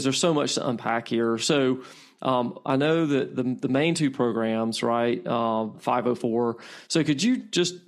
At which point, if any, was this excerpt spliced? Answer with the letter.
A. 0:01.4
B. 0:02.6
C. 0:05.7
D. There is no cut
C